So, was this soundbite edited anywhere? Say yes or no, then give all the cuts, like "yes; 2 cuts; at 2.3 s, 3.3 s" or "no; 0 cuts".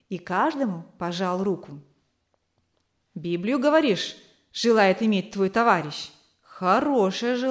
no; 0 cuts